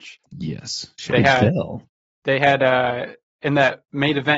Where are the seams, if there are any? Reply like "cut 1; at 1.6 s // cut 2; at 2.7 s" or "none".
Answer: none